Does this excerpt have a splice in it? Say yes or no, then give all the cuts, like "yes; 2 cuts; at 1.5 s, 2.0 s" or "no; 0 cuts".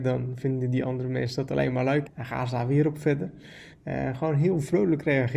yes; 2 cuts; at 2.1 s, 3.7 s